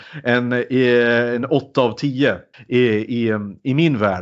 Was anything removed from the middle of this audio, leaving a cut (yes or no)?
no